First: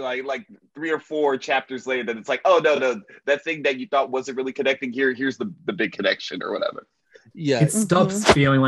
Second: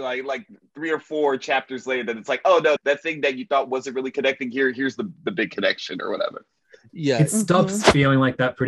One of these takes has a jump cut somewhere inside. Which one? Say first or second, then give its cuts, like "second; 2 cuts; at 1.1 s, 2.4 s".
second; 1 cut; at 2.8 s